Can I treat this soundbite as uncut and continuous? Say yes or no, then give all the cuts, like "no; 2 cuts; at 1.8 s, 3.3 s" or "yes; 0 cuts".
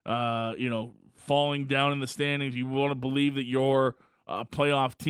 yes; 0 cuts